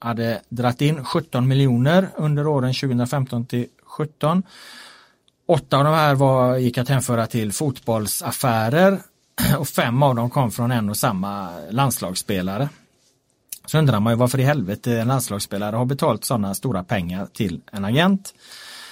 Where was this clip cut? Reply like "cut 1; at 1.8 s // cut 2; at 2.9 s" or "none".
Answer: none